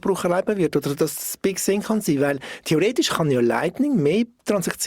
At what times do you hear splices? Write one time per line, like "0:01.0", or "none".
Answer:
none